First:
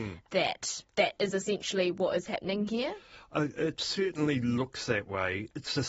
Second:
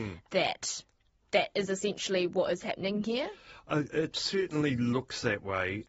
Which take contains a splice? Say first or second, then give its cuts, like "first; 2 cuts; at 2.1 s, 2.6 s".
first; 1 cut; at 0.9 s